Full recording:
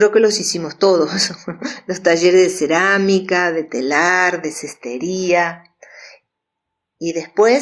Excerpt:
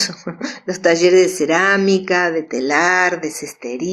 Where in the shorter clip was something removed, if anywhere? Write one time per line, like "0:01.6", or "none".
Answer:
none